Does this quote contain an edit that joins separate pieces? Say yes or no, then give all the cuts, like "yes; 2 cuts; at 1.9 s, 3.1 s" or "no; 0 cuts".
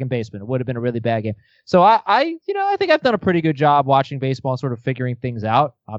no; 0 cuts